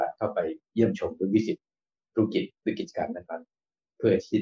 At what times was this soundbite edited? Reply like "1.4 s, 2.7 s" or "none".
none